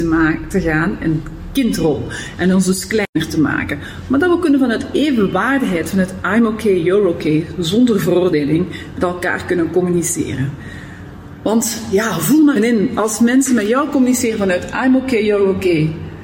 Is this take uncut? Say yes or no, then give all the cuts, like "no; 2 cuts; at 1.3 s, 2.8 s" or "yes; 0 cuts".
no; 1 cut; at 12.6 s